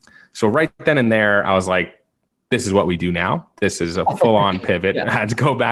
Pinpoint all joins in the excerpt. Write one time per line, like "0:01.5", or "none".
none